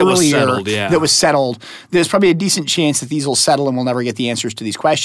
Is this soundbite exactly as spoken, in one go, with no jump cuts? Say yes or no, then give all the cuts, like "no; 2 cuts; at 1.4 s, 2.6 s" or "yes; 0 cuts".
yes; 0 cuts